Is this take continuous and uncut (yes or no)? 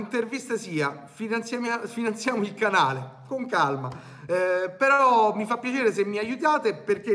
yes